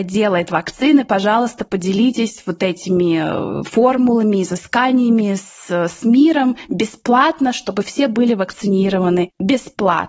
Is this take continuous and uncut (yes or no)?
yes